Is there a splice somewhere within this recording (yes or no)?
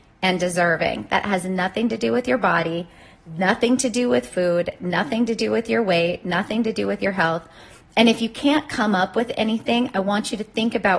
no